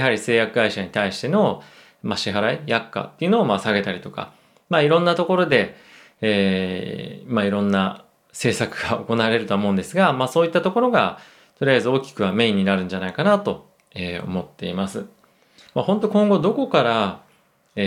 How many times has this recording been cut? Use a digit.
1